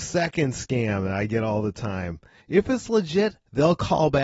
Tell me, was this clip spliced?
yes; 1 cut; at 2.4 s

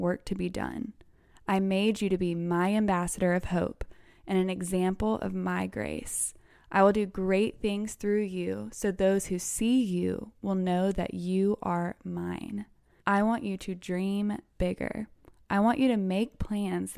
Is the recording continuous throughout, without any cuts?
no; 1 cut; at 13.0 s

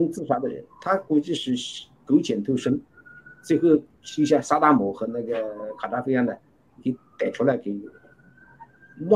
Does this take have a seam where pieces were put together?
yes; 1 cut; at 6.8 s

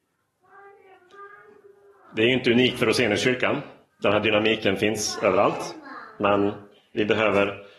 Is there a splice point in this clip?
no; 0 cuts

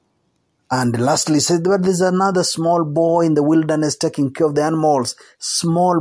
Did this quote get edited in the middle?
no; 0 cuts

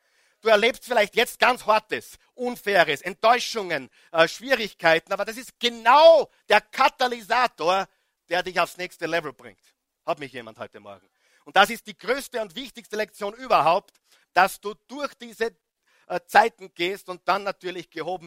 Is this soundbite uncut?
yes; 0 cuts

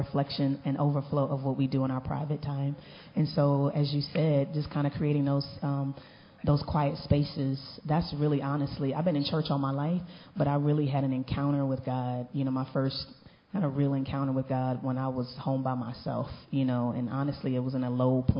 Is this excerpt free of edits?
yes; 0 cuts

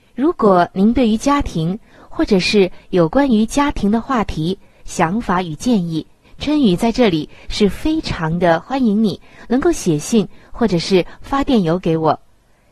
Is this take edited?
yes; 2 cuts; at 4.8 s, 6.2 s

